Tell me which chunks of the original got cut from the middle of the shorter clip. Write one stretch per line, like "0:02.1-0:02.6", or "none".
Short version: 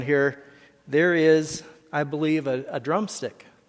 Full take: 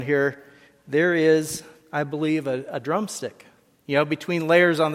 none